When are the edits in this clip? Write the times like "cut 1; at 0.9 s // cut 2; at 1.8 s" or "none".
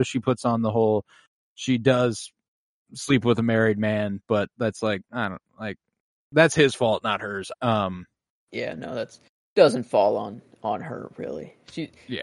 cut 1; at 7.5 s